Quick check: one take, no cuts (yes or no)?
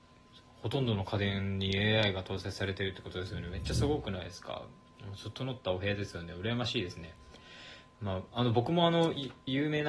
yes